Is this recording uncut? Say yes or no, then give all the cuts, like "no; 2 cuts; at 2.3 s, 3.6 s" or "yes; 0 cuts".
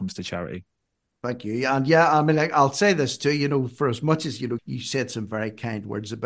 no; 1 cut; at 4.6 s